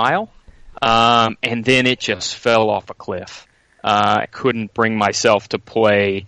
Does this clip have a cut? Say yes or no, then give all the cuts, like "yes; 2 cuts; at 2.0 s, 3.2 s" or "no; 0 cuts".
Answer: yes; 1 cut; at 4.2 s